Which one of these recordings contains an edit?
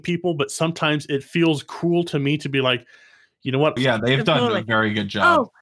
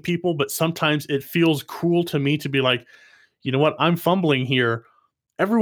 first; 1 cut; at 3.8 s

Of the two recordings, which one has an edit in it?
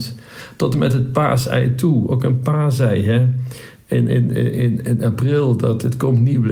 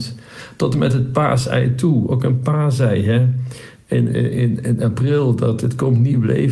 second; 1 cut; at 4.1 s

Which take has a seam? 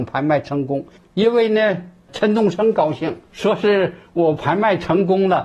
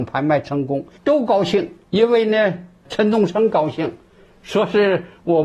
first; 2 cuts; at 1.0 s, 3.3 s

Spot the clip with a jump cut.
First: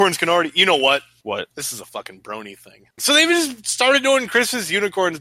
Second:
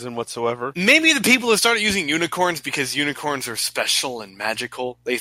first; 1 cut; at 3.0 s

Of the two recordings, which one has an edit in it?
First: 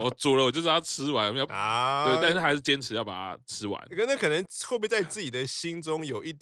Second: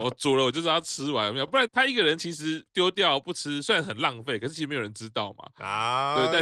first; 1 cut; at 1.5 s

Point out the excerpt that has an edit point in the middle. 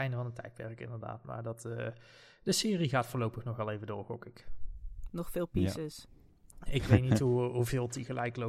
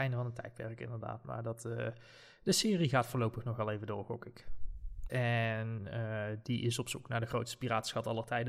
second; 1 cut; at 5.1 s

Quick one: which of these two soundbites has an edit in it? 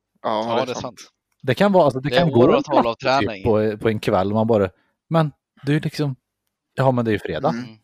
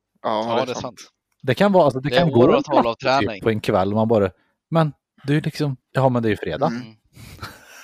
second; 2 cuts; at 3.4 s, 5.8 s

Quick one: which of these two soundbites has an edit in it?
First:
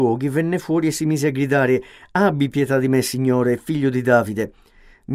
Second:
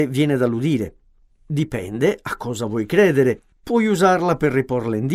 second; 1 cut; at 3.5 s

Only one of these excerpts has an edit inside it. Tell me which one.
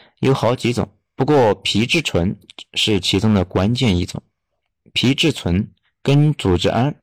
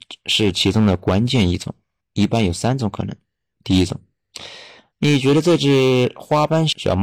second; 1 cut; at 2.0 s

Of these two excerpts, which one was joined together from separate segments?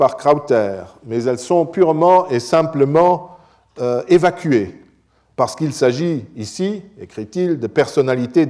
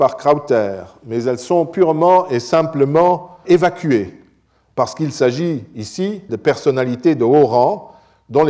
second; 2 cuts; at 3.4 s, 6.3 s

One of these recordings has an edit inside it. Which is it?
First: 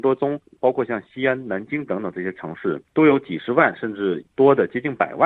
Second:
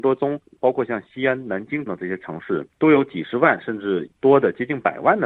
second; 1 cut; at 1.9 s

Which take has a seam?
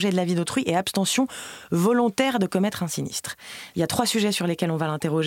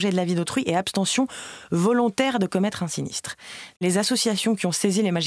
second; 1 cut; at 3.7 s

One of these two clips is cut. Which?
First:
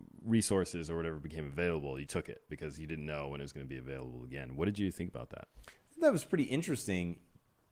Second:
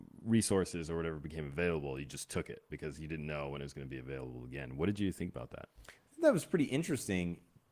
first; 1 cut; at 2.1 s

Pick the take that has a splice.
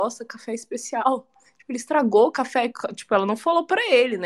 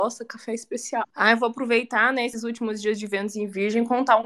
second; 1 cut; at 1.0 s

